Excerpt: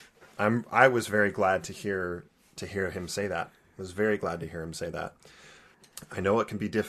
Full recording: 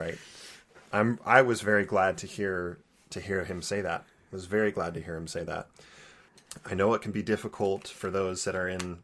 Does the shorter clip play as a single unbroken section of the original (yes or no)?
yes